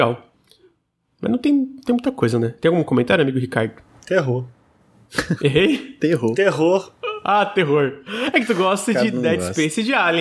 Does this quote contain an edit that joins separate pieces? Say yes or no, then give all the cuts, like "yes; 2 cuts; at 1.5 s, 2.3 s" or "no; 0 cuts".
no; 0 cuts